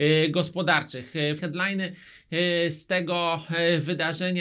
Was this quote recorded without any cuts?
no; 1 cut; at 1.4 s

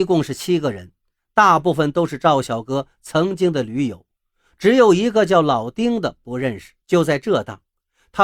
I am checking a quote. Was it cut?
yes; 1 cut; at 6.8 s

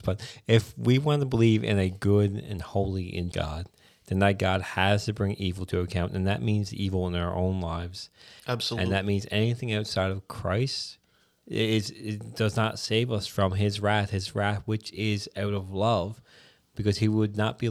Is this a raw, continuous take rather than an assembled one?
no; 1 cut; at 3.3 s

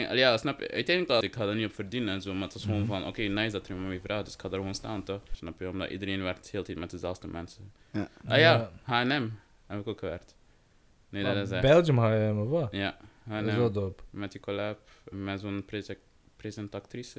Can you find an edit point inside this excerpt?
yes; 3 cuts; at 1.2 s, 5.3 s, 15.1 s

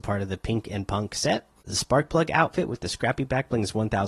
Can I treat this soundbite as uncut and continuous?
no; 1 cut; at 1.6 s

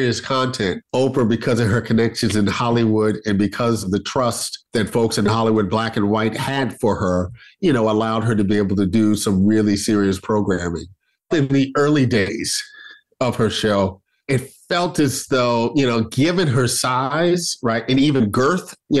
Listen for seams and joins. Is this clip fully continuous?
yes; 0 cuts

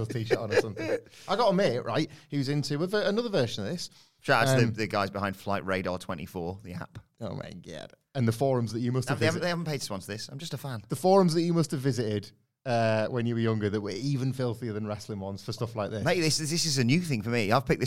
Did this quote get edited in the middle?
no; 0 cuts

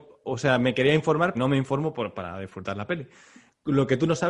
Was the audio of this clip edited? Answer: yes; 1 cut; at 1.3 s

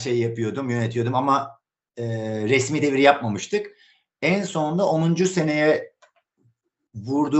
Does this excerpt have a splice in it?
no; 0 cuts

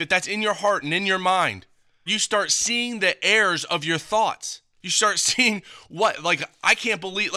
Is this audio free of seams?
no; 2 cuts; at 2.1 s, 4.7 s

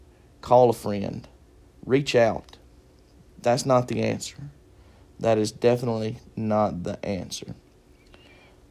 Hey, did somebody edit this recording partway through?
no; 0 cuts

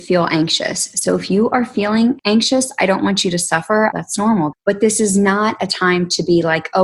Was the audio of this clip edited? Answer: yes; 1 cut; at 4.5 s

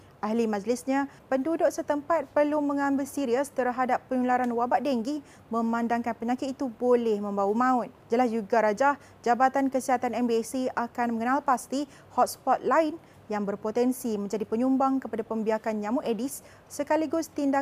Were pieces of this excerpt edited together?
yes; 2 cuts; at 1.2 s, 8.0 s

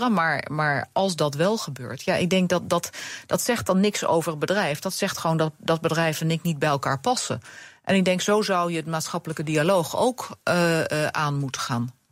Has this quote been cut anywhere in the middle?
no; 0 cuts

